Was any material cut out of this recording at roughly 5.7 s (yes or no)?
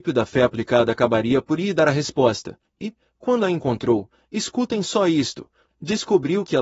yes